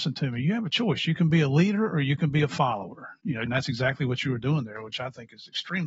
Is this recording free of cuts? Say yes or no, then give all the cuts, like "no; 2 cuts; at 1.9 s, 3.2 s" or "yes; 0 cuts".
no; 1 cut; at 3.5 s